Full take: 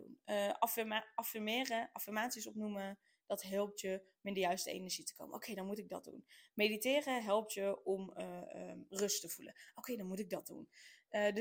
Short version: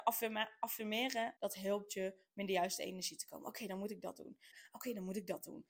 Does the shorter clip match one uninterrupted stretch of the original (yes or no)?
no